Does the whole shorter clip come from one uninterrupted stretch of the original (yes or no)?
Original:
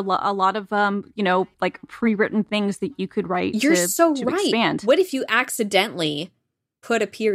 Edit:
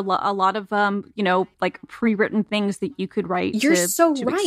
yes